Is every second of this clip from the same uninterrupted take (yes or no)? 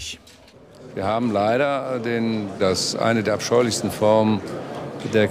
no